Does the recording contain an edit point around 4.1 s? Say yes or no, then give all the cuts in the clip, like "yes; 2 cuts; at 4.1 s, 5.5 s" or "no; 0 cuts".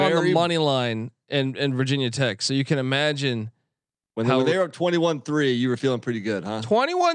no; 0 cuts